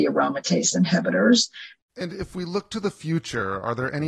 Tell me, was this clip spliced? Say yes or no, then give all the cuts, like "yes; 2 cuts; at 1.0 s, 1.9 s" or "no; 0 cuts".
yes; 1 cut; at 1.8 s